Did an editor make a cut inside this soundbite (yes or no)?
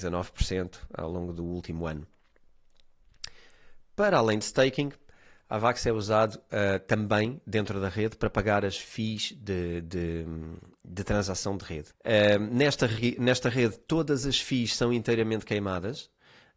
yes